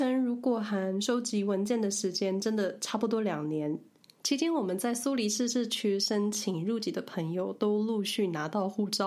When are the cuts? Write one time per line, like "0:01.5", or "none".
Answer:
none